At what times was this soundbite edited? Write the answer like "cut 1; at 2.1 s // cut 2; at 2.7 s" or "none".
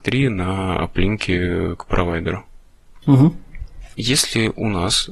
cut 1; at 3.9 s

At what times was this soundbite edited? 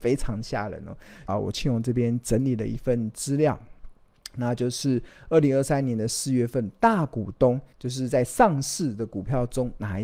cut 1; at 1.3 s // cut 2; at 7.7 s

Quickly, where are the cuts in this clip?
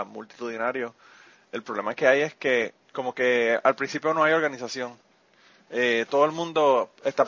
cut 1; at 2.8 s

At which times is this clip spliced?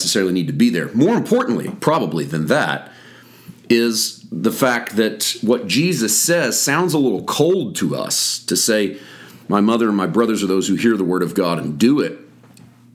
none

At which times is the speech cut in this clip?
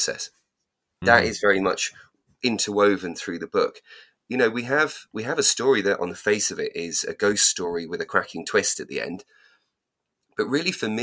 cut 1; at 1.0 s

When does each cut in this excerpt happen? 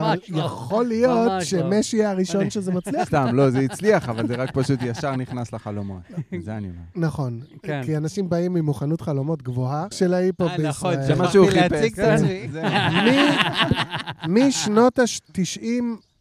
cut 1; at 9.9 s

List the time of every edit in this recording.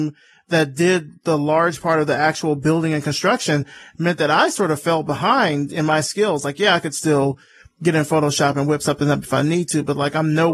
none

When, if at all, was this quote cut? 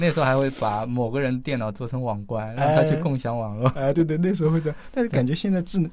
cut 1; at 3.9 s

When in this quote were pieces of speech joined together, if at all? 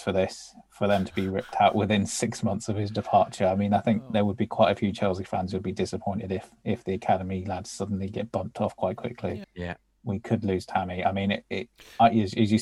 cut 1; at 9.4 s

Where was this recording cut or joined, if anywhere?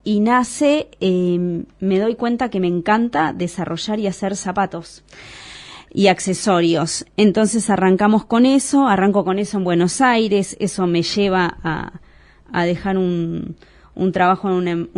cut 1; at 1.7 s

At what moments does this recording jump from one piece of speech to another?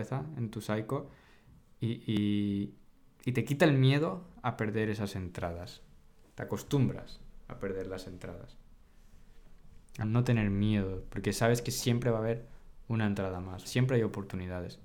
cut 1; at 10.0 s // cut 2; at 13.6 s

